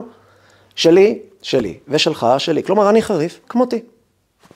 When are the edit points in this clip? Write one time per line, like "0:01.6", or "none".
0:03.4